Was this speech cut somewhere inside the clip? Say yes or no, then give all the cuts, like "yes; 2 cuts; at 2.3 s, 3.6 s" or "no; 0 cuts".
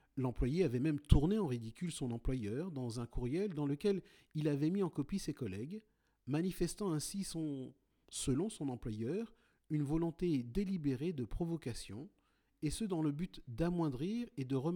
no; 0 cuts